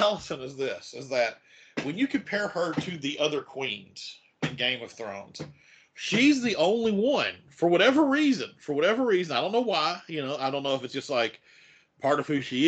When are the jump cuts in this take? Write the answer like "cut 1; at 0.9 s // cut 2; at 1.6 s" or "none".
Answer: none